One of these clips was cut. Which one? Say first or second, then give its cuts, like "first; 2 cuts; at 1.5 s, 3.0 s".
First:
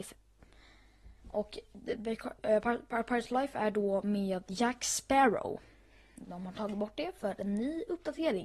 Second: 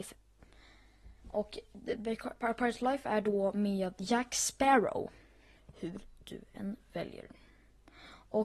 second; 2 cuts; at 2.4 s, 5.6 s